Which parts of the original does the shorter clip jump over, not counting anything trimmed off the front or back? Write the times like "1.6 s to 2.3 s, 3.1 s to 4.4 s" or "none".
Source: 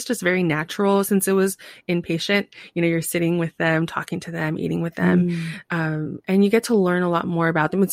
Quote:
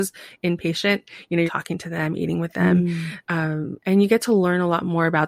2.9 s to 3.9 s